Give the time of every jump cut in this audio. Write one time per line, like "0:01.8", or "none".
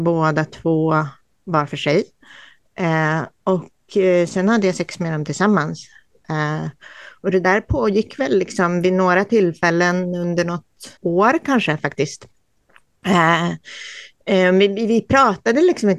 0:11.0